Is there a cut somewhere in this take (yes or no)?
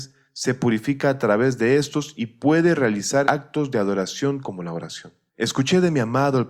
yes